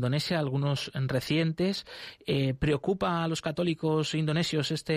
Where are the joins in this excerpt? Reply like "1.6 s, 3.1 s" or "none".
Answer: none